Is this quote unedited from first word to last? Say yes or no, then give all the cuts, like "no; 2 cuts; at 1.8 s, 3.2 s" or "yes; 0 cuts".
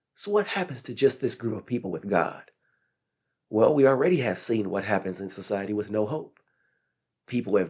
yes; 0 cuts